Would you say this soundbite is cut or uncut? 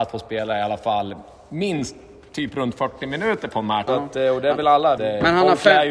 cut